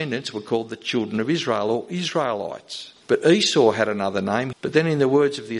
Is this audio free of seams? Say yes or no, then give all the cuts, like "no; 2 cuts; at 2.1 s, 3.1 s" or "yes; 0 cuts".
no; 2 cuts; at 3.0 s, 4.5 s